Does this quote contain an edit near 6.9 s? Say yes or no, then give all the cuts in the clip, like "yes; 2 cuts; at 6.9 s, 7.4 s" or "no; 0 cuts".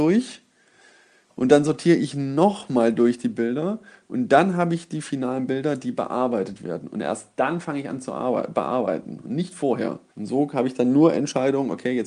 no; 1 cut; at 10.1 s